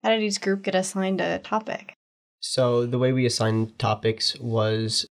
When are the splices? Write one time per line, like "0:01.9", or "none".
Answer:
none